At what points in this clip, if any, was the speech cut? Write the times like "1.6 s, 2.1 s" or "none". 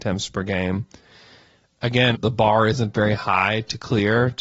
2.2 s